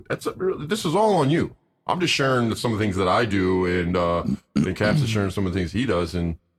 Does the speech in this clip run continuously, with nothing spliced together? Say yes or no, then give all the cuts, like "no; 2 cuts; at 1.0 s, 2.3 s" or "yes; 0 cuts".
yes; 0 cuts